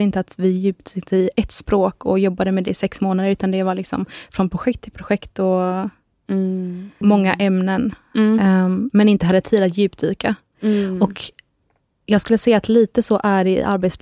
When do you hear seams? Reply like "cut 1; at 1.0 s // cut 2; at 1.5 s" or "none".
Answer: cut 1; at 7.0 s